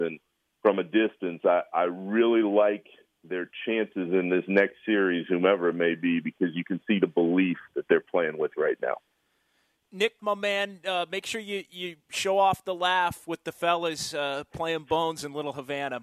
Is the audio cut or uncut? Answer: cut